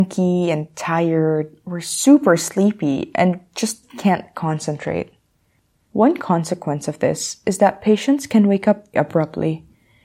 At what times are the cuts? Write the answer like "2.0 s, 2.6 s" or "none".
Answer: 5.8 s, 8.9 s

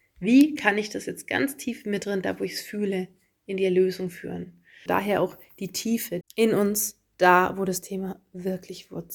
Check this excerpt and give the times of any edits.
4.9 s, 6.2 s

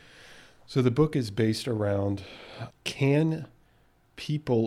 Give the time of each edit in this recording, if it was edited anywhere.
2.7 s

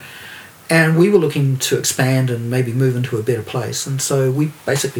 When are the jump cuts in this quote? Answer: none

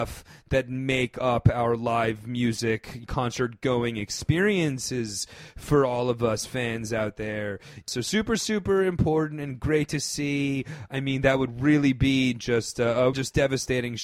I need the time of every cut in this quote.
10.9 s, 13.1 s

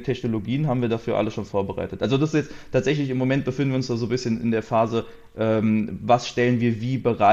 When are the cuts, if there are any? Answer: none

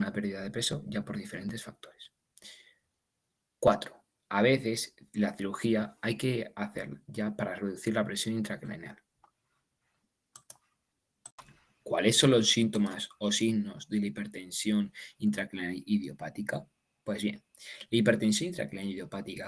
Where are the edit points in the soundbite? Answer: none

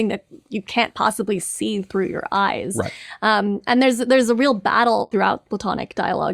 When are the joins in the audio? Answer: none

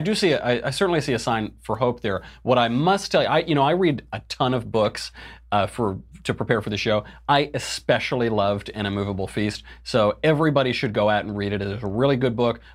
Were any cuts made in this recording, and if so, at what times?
none

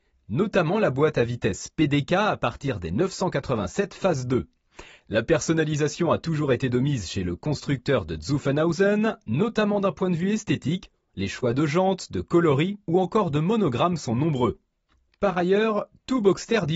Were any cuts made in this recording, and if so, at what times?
none

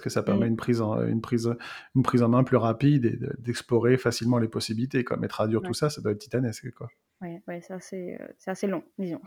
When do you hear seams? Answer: none

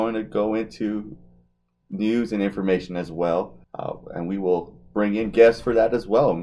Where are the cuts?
3.6 s

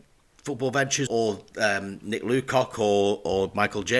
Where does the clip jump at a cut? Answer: 1.1 s

